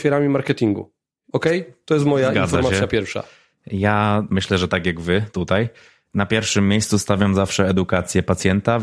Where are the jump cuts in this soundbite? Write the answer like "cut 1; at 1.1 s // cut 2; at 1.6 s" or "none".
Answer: none